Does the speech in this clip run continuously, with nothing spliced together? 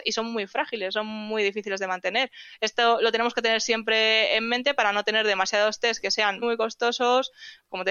no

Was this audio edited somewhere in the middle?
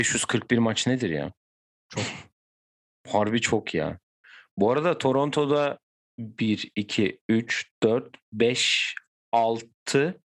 no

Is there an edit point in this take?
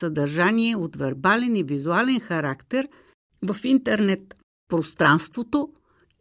no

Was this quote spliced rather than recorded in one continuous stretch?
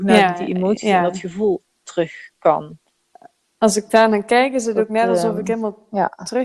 no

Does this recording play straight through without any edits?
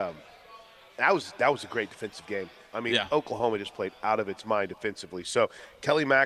yes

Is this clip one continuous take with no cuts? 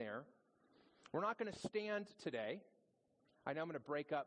yes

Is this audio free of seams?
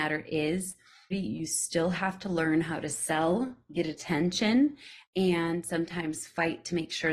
no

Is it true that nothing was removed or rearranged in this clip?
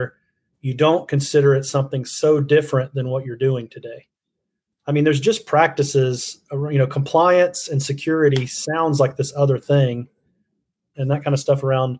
no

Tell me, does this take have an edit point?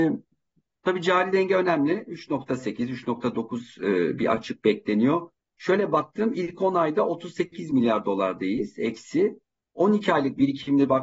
no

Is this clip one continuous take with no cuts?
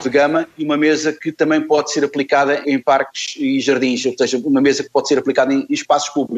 no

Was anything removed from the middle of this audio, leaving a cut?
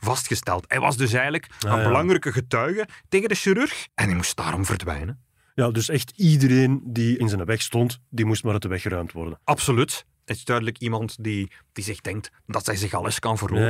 yes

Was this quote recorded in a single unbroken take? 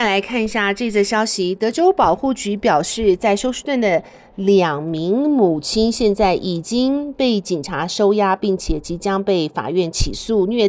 yes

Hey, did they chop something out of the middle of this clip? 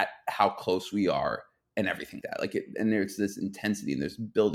yes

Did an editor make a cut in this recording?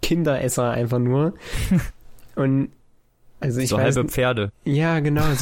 no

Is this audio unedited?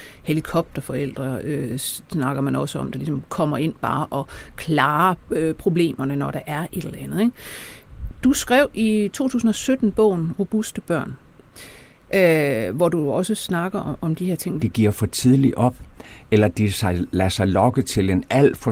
no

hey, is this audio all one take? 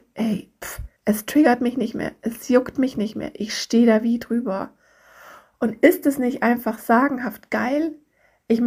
no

